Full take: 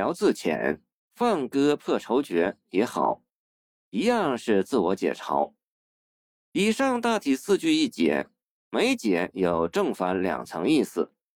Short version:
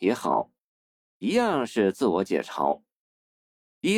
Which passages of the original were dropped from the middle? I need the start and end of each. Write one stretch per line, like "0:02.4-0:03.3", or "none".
none

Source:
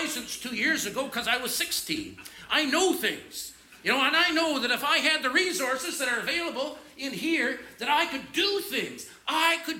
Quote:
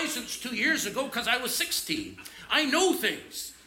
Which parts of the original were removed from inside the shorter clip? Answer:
none

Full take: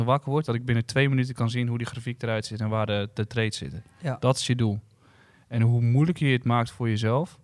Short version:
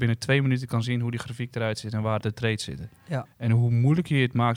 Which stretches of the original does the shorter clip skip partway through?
0:02.9-0:03.1
0:04.2-0:05.4

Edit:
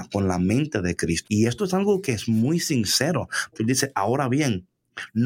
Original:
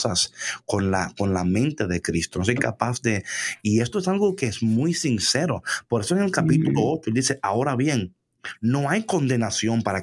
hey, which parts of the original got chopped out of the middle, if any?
0:02.3-0:03.6
0:05.9-0:07.0

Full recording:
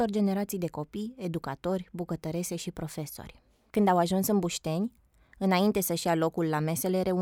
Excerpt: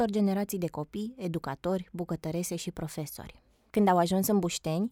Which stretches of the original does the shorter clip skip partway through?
none

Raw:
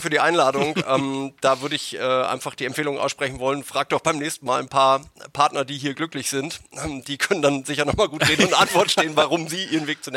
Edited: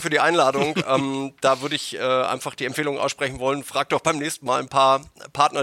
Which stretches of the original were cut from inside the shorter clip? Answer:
none

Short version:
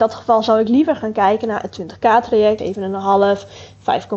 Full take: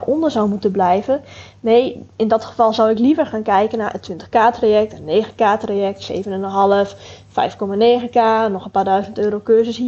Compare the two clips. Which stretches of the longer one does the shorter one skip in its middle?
0:04.9-0:06.1

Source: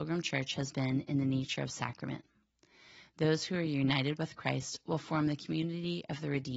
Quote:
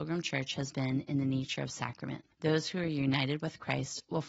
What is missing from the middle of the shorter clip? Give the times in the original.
0:02.3-0:03.1

